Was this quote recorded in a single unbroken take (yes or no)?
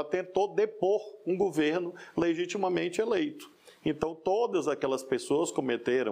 yes